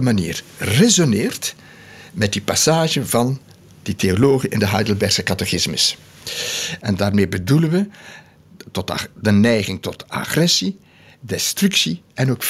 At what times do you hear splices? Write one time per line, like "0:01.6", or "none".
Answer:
0:06.8